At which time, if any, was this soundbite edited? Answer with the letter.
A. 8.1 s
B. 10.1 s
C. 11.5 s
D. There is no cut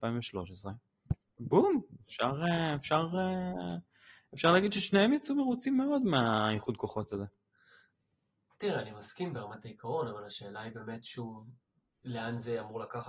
D